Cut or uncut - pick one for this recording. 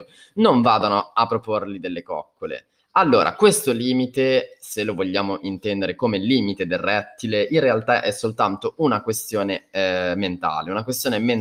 cut